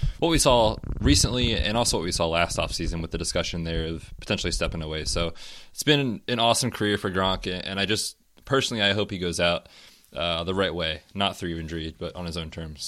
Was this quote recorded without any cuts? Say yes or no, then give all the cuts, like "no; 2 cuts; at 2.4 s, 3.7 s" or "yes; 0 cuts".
yes; 0 cuts